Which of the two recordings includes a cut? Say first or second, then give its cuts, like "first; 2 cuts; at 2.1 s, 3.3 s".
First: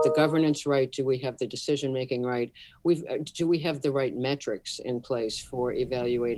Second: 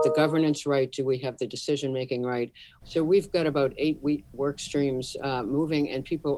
second; 1 cut; at 2.8 s